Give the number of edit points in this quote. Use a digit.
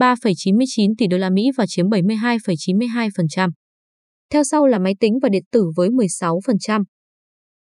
1